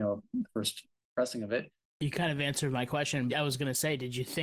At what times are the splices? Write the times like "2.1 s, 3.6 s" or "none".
1.9 s, 3.3 s